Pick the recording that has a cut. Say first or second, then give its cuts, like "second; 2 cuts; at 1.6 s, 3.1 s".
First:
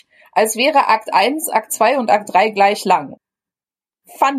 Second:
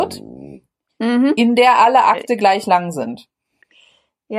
first; 1 cut; at 3.1 s